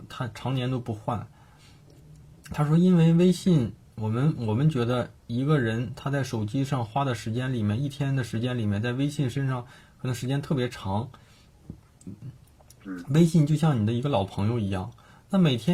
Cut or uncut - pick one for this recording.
uncut